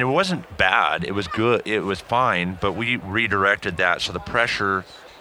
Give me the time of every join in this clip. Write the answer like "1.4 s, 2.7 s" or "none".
none